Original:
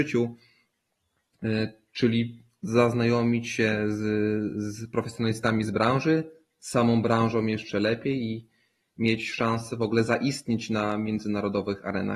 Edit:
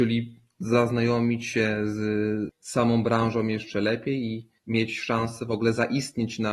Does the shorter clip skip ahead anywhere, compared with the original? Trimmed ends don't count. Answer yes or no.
yes